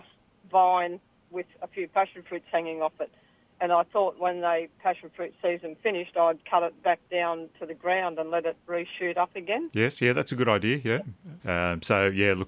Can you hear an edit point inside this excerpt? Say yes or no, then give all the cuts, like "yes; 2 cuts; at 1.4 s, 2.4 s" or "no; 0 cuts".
yes; 1 cut; at 11.4 s